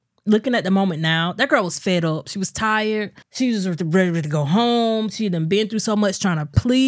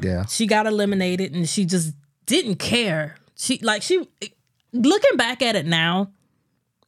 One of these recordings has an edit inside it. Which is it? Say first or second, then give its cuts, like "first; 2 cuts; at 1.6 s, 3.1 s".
first; 1 cut; at 3.2 s